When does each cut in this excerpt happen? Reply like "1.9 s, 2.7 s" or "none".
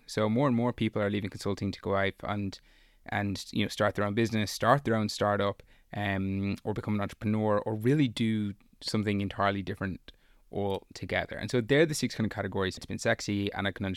12.8 s